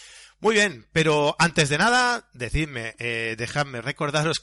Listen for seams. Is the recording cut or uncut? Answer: uncut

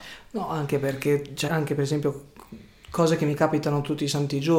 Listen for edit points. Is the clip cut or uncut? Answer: cut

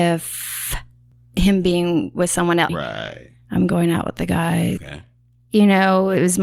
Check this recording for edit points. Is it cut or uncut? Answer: cut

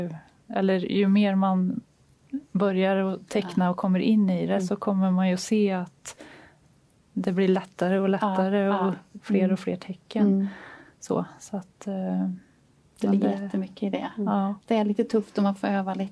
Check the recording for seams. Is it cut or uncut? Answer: cut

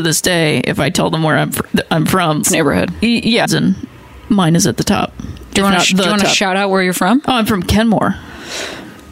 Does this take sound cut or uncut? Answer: cut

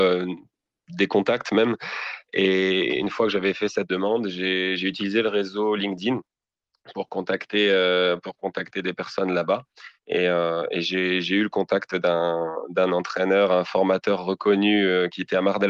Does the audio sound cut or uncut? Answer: uncut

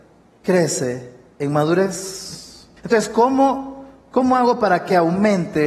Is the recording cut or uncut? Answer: cut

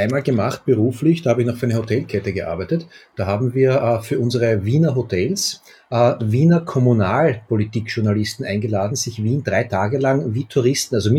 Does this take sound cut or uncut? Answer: uncut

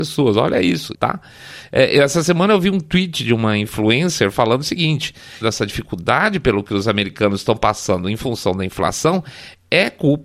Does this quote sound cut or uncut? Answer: cut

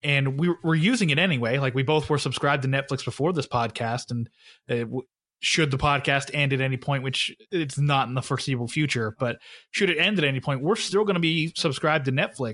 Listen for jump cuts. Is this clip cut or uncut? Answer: uncut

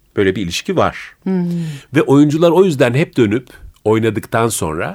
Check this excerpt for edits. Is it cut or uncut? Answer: cut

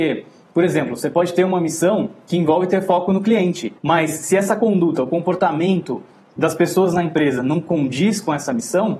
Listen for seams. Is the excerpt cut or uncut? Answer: cut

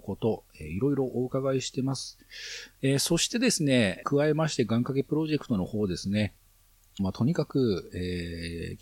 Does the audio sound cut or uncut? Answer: cut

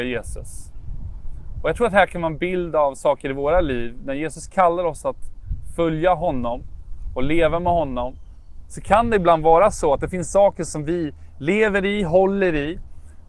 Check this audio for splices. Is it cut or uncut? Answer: uncut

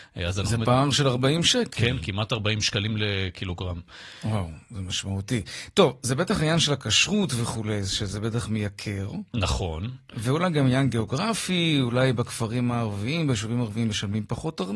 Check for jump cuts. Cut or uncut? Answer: uncut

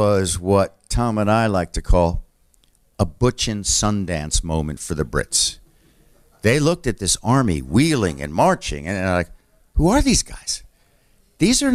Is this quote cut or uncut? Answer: uncut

